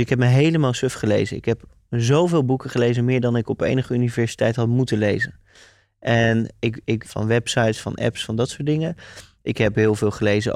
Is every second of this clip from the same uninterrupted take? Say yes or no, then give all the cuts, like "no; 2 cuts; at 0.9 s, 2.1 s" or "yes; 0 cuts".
no; 1 cut; at 7.0 s